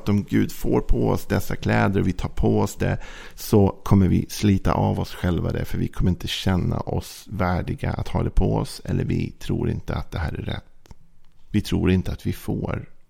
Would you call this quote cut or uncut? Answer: uncut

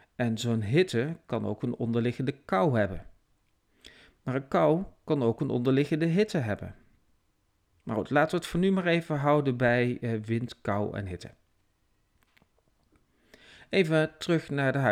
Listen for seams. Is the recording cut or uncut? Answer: uncut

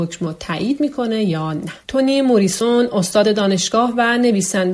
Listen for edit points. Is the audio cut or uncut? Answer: cut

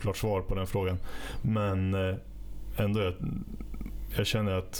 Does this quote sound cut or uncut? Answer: uncut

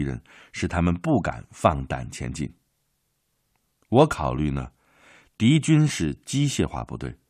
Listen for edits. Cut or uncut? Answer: uncut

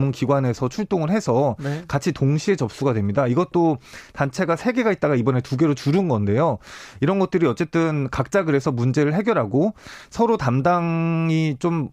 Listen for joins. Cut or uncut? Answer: uncut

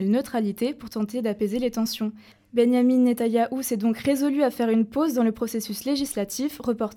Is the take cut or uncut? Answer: uncut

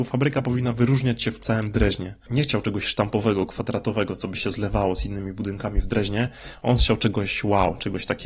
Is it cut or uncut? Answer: uncut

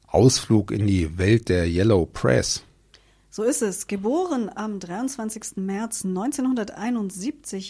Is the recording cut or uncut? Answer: uncut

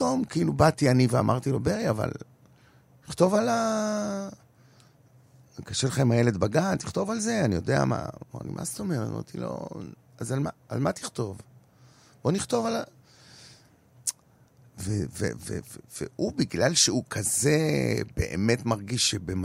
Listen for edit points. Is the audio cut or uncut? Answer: uncut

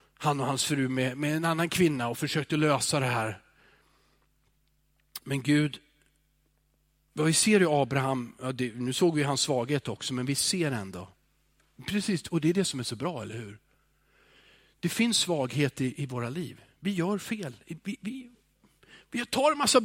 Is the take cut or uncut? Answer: uncut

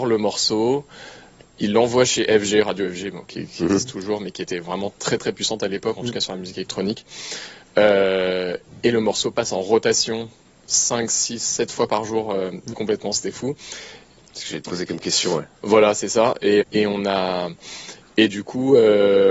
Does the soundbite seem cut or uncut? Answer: cut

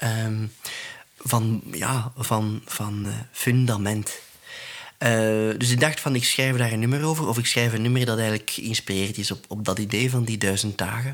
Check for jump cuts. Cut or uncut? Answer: uncut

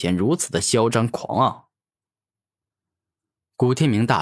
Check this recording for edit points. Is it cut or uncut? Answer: uncut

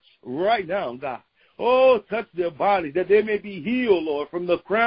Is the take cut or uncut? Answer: uncut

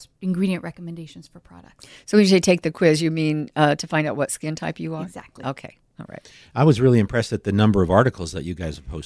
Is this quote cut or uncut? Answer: uncut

